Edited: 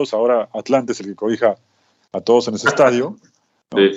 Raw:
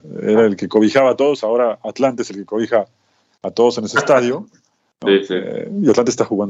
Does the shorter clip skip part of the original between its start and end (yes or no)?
no